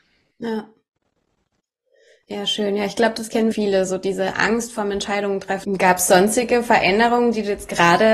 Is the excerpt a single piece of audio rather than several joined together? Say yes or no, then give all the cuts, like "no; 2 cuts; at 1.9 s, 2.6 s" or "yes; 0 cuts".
no; 2 cuts; at 3.5 s, 5.6 s